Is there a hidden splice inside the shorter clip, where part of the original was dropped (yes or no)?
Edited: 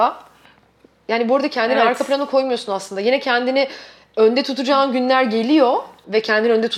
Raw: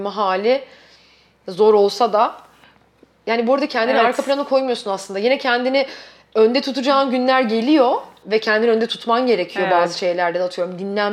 no